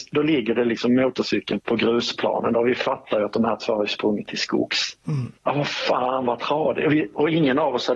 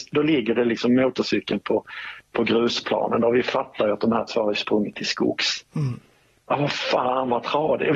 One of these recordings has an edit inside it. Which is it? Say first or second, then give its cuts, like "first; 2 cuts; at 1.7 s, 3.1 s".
first; 2 cuts; at 1.6 s, 5.4 s